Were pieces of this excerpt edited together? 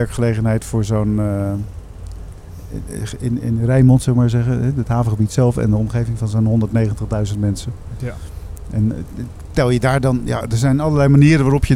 no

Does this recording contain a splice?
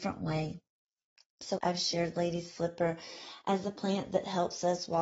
yes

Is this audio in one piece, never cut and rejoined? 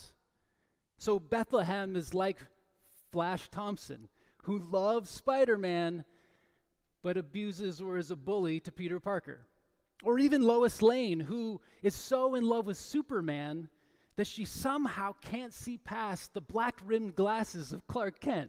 yes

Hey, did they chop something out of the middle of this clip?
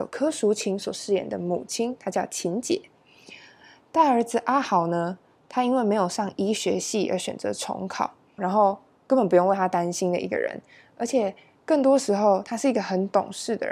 yes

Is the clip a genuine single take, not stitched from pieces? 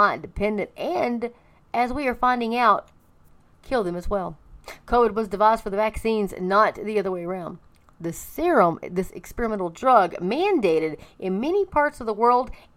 yes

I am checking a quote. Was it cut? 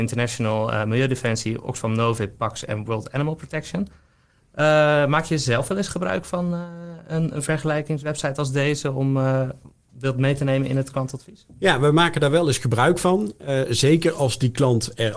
no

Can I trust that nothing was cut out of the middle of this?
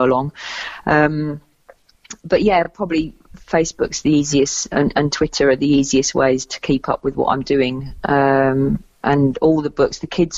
yes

